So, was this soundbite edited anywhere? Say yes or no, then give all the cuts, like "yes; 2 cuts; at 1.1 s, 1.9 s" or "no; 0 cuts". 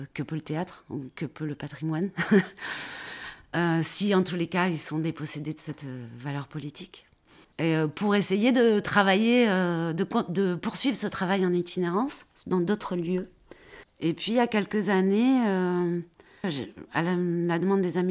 yes; 2 cuts; at 7.5 s, 16.4 s